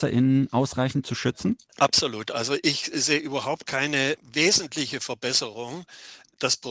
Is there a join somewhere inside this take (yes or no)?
yes